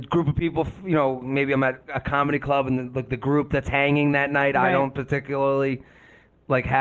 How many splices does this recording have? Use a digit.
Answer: 0